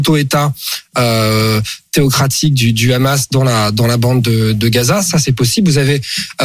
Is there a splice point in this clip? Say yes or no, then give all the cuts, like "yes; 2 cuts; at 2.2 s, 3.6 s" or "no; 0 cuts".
no; 0 cuts